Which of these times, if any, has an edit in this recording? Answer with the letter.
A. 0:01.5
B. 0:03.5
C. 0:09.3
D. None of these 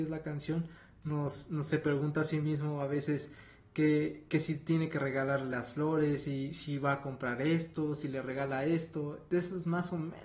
D